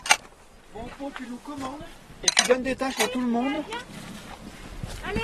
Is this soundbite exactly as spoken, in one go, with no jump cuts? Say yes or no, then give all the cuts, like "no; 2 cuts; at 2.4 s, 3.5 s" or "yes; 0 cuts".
yes; 0 cuts